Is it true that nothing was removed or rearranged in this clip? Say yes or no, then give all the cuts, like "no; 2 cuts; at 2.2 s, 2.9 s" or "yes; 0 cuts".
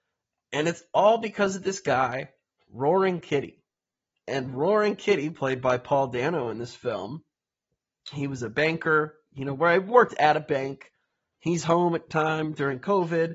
no; 1 cut; at 4.1 s